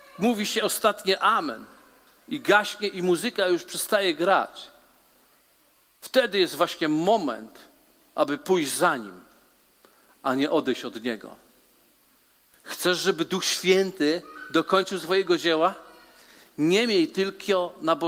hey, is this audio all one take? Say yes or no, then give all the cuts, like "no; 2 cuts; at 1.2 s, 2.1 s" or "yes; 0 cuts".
yes; 0 cuts